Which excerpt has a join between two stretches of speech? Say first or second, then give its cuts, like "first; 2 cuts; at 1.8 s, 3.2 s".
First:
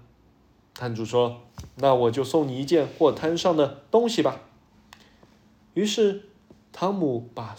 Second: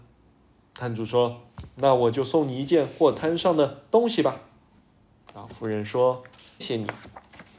second; 2 cuts; at 4.8 s, 6.6 s